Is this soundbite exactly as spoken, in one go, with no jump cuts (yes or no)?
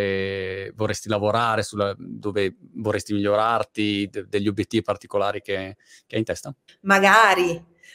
no